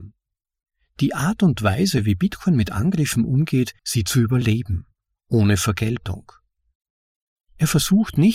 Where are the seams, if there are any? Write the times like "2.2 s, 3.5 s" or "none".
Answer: 3.8 s

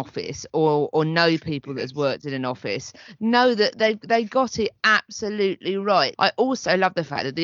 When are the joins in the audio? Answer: 6.2 s

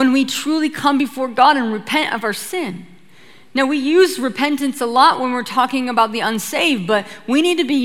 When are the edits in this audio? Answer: none

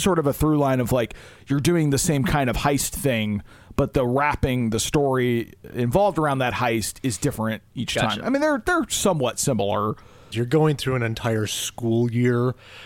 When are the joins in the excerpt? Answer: 10.3 s

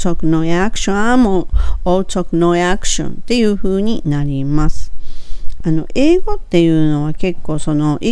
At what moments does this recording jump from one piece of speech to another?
5.6 s

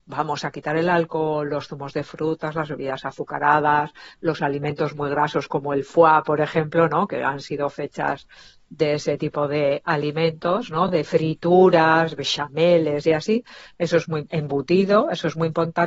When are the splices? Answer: none

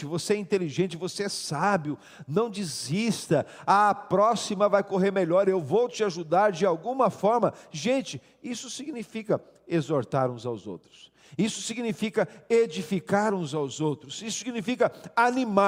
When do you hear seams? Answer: none

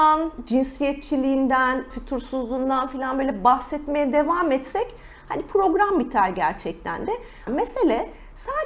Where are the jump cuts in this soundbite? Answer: 1.9 s, 7.5 s

